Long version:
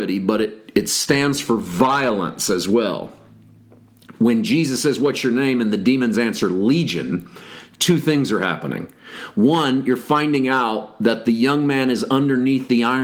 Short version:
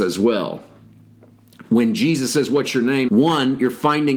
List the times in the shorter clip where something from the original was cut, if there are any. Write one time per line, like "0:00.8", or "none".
0:03.1